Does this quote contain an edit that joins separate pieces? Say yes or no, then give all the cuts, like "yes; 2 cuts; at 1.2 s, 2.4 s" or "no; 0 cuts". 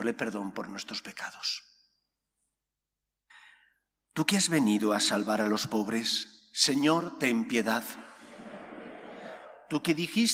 no; 0 cuts